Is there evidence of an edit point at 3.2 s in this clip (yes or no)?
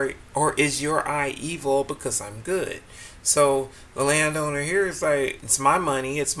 no